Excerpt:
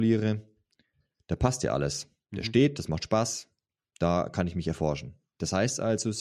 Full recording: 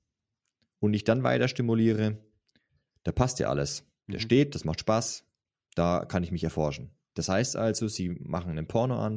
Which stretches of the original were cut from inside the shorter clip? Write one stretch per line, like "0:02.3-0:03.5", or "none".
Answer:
none

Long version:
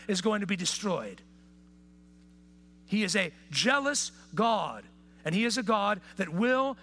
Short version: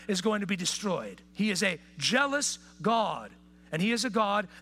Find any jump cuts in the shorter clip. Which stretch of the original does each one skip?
0:01.3-0:02.8

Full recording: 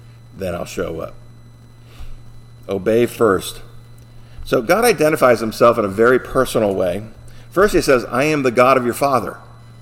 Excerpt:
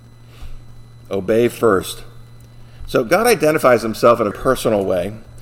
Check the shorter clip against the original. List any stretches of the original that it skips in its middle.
0:05.9-0:06.2

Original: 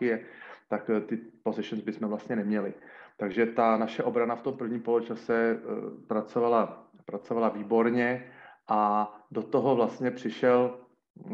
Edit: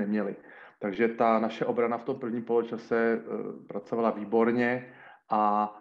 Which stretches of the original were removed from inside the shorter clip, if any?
0:06.0-0:07.0

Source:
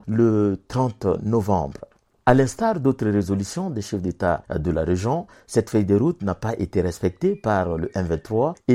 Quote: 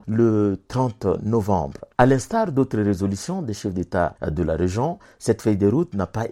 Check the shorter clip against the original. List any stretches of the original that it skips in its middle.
0:01.9-0:02.2

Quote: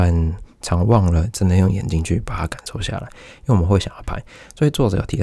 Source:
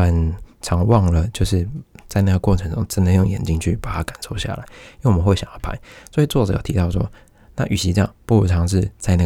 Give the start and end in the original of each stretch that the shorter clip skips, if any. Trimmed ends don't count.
0:01.3-0:02.9

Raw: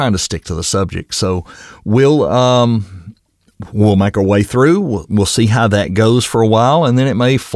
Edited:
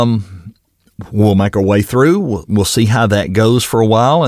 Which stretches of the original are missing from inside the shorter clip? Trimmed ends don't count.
none

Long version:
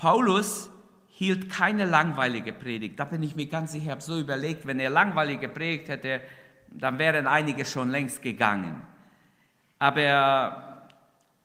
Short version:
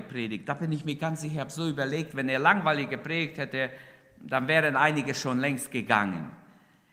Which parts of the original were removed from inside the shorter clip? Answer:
none

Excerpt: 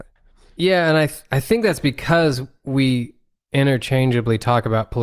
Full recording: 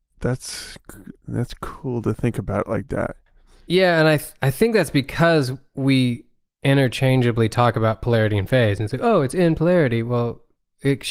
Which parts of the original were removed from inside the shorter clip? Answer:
none

